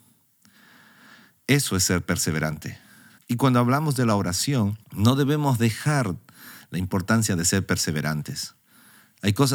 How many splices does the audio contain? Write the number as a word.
two